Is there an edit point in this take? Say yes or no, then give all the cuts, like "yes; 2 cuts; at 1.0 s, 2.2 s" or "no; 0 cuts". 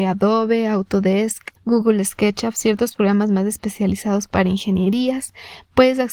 yes; 1 cut; at 1.6 s